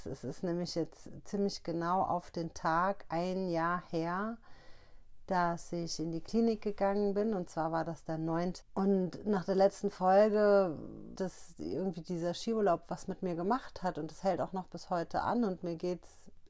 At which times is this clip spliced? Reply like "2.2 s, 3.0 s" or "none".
8.6 s, 11.2 s